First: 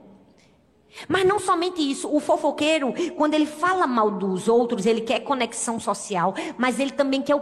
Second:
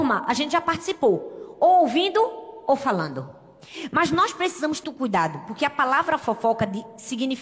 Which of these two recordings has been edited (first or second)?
second